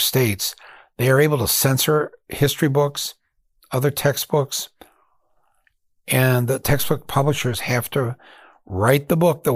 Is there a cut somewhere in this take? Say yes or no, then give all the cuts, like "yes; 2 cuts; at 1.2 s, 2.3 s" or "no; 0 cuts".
no; 0 cuts